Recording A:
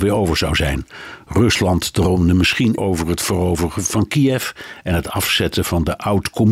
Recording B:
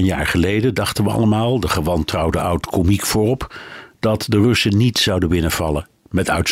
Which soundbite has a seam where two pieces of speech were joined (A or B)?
A